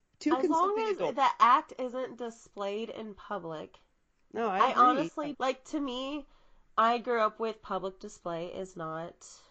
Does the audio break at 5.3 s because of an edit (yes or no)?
yes